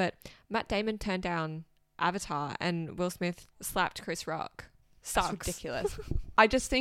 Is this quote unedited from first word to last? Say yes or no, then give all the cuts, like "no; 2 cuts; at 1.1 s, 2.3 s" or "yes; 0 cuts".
yes; 0 cuts